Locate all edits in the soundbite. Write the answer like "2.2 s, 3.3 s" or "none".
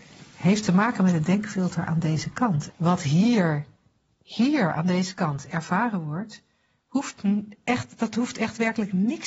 2.7 s